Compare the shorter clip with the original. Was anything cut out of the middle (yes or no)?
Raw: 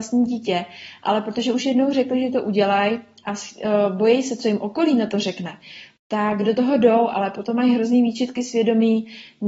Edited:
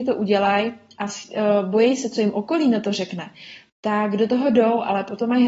no